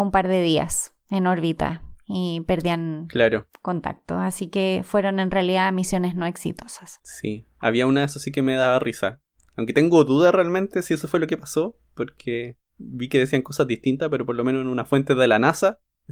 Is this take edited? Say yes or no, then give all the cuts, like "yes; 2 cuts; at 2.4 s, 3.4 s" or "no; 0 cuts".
no; 0 cuts